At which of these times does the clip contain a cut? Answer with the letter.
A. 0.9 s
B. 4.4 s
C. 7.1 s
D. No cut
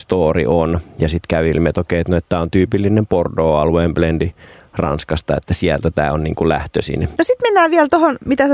C